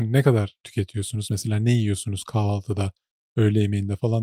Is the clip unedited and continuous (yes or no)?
yes